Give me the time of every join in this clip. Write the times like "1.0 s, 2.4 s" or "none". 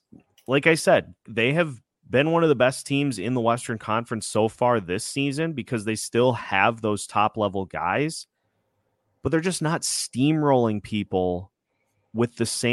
1.3 s